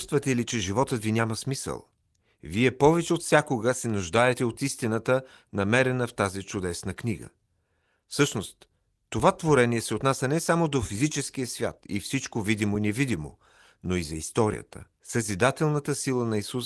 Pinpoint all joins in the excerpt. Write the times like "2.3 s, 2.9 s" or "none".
8.0 s, 15.0 s